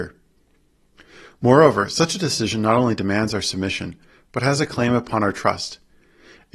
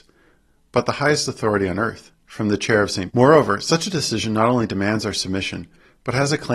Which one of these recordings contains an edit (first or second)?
second